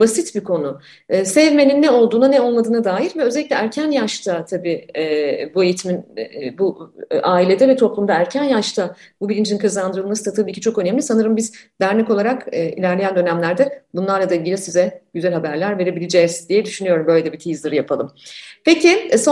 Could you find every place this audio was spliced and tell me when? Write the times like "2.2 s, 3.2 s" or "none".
none